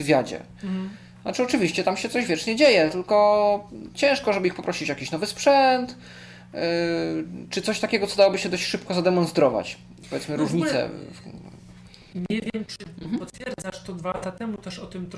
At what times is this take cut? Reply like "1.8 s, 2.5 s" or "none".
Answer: none